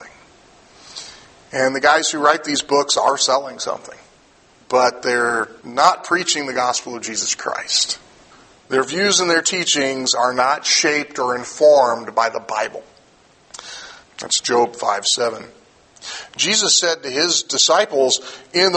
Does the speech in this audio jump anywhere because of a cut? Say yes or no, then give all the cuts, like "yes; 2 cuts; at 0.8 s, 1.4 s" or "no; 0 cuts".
yes; 1 cut; at 14.0 s